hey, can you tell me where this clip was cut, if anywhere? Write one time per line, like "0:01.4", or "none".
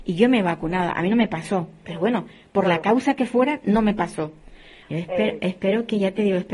0:04.8